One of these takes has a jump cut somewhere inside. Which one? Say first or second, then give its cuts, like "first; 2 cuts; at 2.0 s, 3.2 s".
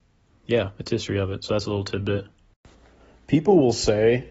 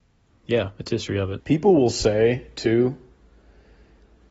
second; 1 cut; at 1.4 s